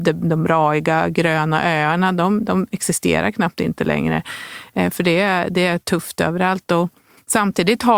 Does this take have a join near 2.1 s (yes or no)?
no